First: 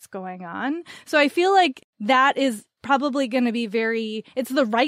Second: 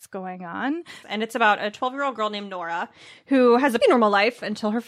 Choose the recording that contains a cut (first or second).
second